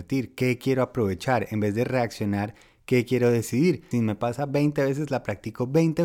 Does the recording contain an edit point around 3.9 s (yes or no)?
yes